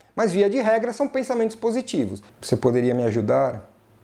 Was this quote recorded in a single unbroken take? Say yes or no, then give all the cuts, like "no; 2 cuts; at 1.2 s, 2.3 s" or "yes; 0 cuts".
no; 1 cut; at 2.3 s